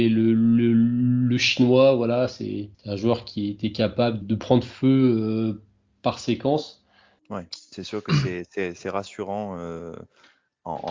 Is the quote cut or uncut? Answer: cut